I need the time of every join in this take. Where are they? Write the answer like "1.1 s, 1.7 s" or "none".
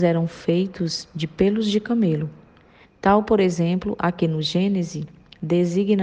2.8 s

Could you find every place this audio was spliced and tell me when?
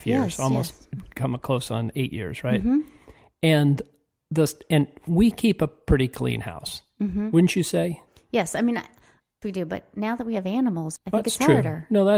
9.4 s, 11.0 s

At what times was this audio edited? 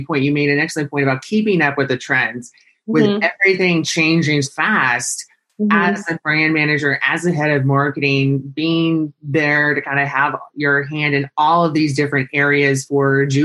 4.4 s

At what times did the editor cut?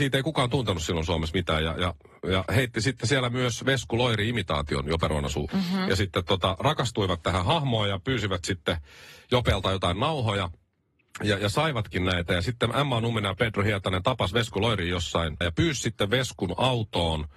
5.5 s, 15.4 s

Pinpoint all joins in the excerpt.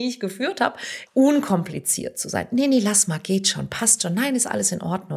1.1 s

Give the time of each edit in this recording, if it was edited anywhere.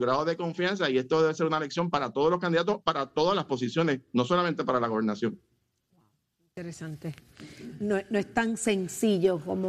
none

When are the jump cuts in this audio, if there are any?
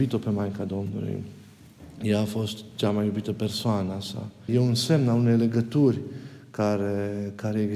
4.5 s

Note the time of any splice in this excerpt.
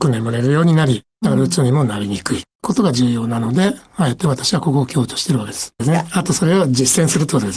5.8 s

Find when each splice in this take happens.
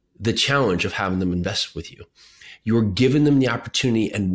none

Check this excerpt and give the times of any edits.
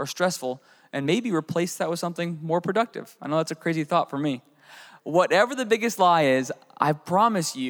none

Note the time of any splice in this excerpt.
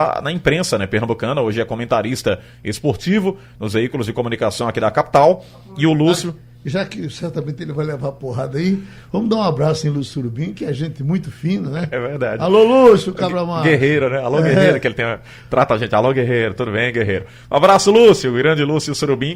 none

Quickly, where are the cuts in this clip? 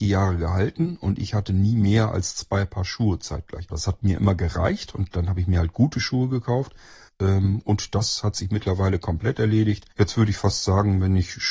3.7 s, 7.1 s, 9.9 s

